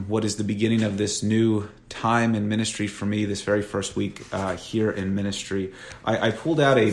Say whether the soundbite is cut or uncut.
uncut